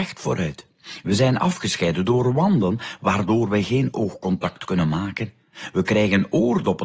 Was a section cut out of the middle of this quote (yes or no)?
no